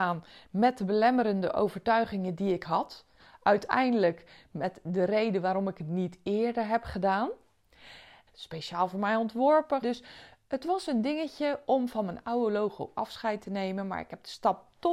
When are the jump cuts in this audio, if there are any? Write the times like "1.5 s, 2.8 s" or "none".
8.3 s, 9.8 s